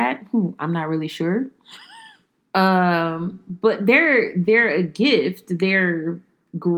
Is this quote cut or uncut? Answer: uncut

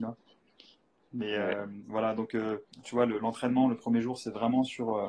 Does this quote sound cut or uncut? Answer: uncut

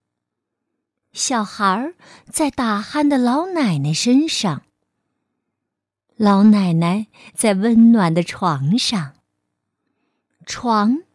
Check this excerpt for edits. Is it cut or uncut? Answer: uncut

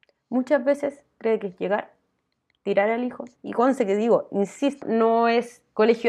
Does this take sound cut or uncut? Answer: cut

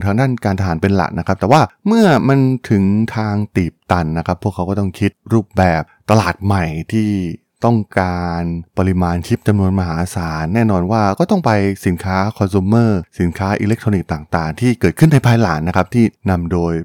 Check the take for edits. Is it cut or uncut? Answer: uncut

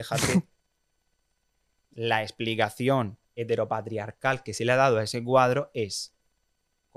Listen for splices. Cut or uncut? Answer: cut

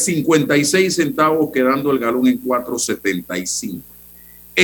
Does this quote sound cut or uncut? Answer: uncut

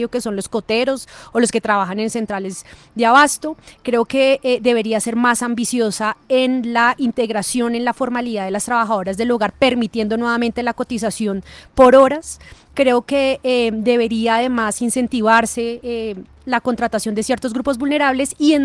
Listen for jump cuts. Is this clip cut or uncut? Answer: uncut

